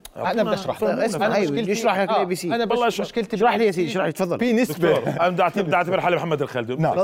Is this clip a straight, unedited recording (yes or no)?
no